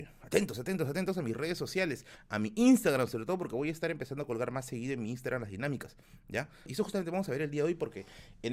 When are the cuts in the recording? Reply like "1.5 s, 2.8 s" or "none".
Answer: 6.7 s

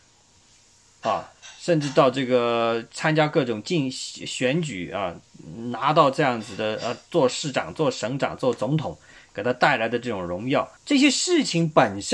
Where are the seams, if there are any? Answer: 10.8 s

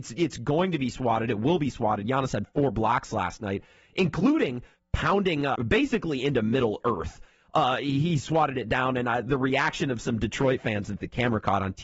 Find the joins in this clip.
5.5 s

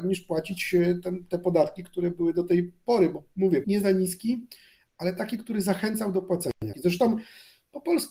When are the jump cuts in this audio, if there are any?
3.6 s, 6.7 s

